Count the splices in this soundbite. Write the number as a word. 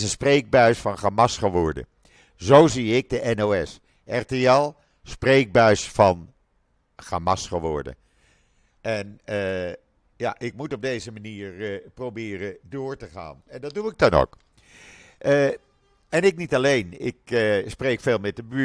one